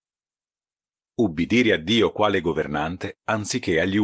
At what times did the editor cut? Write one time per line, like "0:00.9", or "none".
0:01.1